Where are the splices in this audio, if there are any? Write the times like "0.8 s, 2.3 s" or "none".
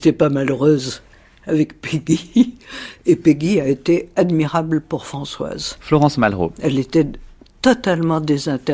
none